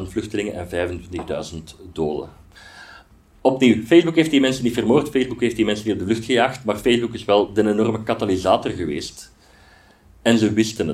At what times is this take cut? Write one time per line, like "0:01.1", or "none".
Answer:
none